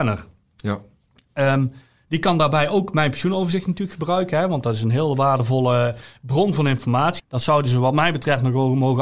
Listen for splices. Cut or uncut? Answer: cut